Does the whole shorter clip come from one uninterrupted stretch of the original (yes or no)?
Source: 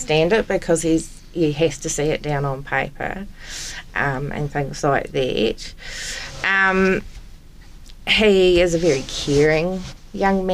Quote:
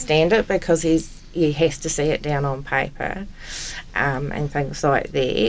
yes